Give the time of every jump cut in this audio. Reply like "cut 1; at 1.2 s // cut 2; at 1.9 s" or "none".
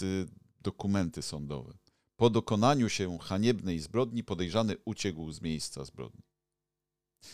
none